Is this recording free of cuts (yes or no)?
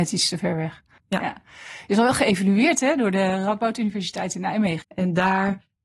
no